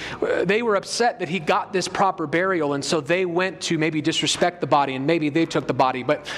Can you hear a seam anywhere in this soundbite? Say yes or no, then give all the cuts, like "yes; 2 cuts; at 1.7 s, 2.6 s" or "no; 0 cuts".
no; 0 cuts